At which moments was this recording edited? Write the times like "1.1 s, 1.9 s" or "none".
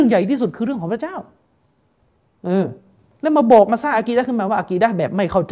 none